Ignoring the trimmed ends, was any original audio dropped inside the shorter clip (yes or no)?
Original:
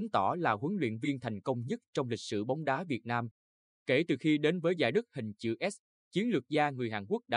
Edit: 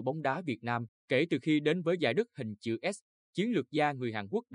yes